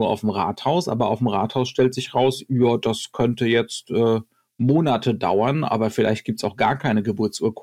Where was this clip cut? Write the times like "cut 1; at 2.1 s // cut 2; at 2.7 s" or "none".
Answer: none